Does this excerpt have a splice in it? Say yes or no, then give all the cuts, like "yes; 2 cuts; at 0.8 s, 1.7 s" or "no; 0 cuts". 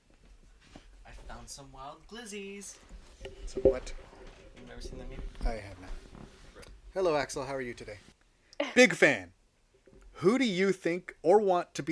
yes; 1 cut; at 8.1 s